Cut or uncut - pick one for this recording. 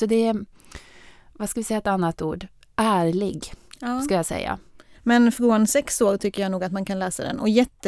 cut